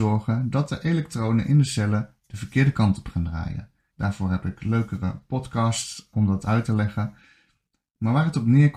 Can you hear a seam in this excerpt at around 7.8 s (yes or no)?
no